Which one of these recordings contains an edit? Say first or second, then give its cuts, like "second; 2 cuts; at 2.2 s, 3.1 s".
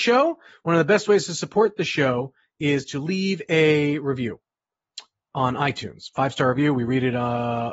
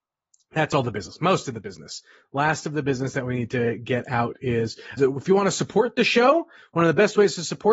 second; 1 cut; at 5.0 s